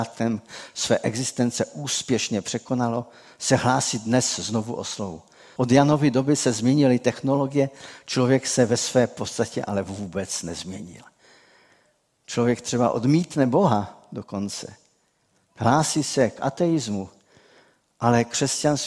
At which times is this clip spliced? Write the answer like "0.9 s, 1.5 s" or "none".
5.6 s